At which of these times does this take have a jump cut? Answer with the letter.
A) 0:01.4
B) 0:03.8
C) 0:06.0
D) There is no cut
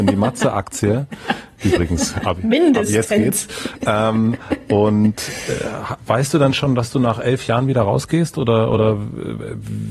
D